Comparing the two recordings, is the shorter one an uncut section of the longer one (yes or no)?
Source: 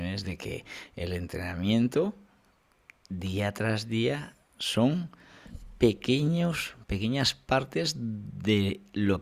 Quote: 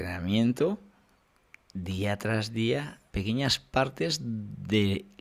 no